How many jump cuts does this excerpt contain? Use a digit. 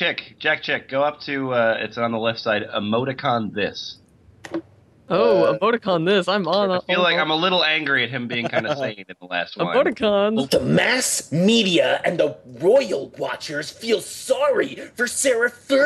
1